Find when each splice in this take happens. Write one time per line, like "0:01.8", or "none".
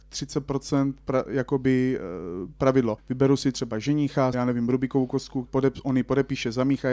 0:03.0
0:04.3
0:05.5